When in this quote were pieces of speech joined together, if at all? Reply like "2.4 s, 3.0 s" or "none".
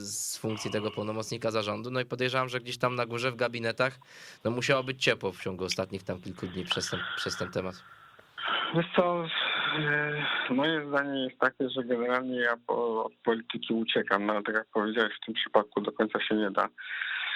none